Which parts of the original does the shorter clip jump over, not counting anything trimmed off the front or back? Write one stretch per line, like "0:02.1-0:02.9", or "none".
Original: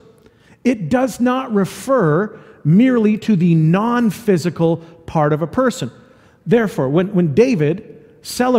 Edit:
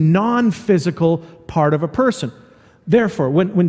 none